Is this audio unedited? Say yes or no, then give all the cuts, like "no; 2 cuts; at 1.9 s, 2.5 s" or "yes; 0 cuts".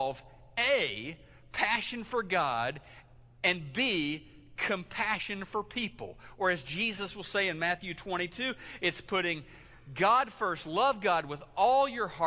yes; 0 cuts